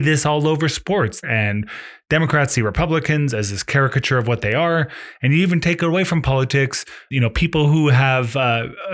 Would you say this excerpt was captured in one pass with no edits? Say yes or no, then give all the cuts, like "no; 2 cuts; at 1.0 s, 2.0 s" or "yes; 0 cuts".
no; 2 cuts; at 1.2 s, 7.1 s